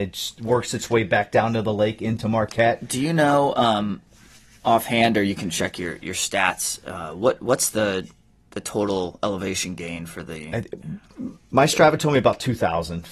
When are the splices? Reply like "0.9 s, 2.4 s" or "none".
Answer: none